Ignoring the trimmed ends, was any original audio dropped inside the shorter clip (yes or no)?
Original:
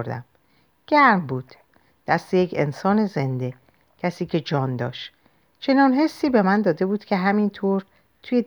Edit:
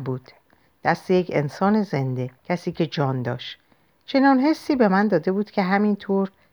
yes